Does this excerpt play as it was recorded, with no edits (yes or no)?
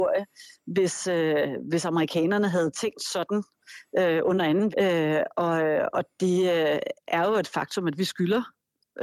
no